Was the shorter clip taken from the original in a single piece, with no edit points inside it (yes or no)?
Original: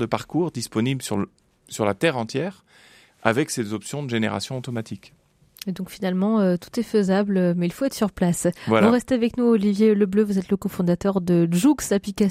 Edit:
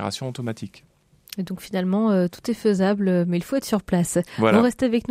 yes